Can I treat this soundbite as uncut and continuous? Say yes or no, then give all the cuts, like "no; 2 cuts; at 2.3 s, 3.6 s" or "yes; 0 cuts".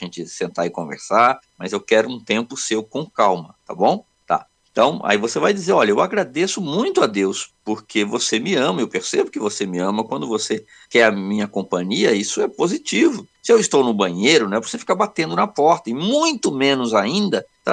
no; 1 cut; at 13.4 s